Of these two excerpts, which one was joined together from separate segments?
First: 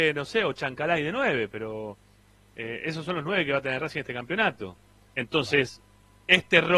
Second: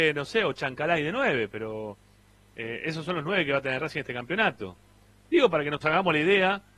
first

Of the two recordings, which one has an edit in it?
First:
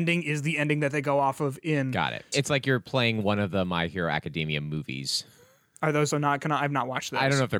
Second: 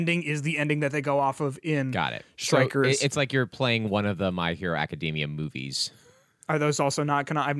first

